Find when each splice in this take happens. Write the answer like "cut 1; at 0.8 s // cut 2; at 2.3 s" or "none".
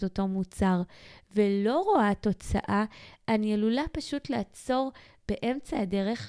none